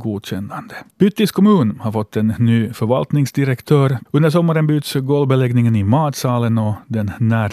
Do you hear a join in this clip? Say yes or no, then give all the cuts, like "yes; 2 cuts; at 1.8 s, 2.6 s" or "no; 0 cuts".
yes; 2 cuts; at 0.9 s, 4.1 s